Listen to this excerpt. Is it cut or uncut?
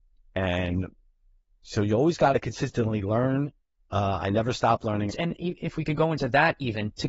cut